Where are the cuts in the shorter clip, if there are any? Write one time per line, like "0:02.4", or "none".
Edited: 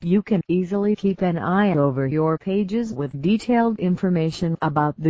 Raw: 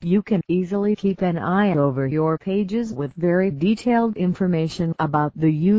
0:03.1

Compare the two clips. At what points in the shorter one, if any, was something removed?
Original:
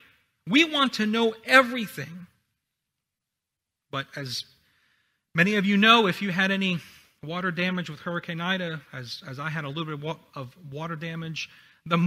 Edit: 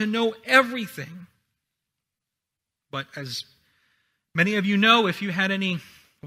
none

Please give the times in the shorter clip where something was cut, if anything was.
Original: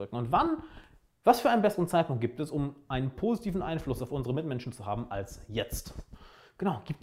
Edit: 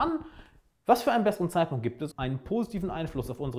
0:02.1

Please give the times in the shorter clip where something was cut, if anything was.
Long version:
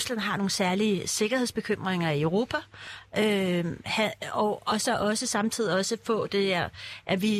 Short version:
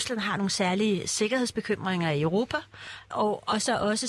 0:03.1

